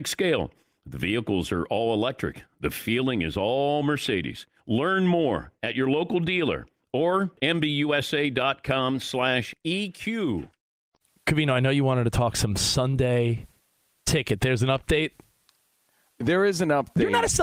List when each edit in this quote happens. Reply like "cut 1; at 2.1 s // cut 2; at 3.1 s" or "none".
none